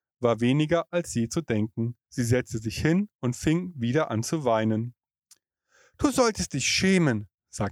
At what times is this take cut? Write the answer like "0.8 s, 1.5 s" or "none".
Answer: 2.0 s